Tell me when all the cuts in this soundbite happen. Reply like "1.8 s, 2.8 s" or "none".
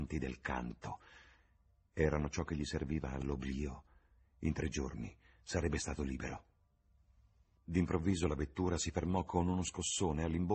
none